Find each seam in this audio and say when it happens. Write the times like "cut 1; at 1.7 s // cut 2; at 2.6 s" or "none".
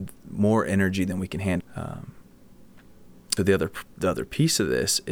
cut 1; at 1.6 s // cut 2; at 3.4 s